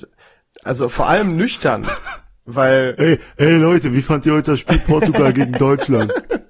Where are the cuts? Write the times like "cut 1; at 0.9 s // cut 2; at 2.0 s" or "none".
none